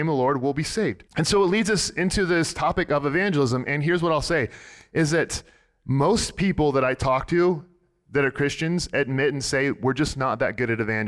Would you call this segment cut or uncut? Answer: cut